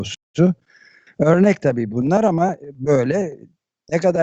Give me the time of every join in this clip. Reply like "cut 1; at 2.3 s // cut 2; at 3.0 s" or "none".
cut 1; at 1.1 s